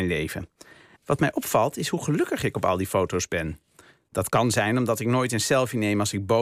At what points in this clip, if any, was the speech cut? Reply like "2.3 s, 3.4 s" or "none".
0.9 s